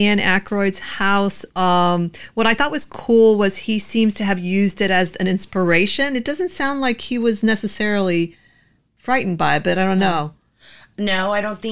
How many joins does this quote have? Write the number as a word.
zero